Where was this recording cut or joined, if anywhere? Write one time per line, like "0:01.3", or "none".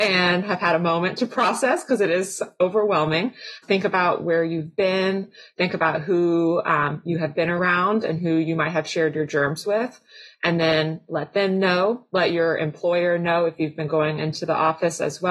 none